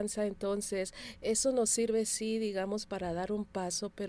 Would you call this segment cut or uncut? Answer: uncut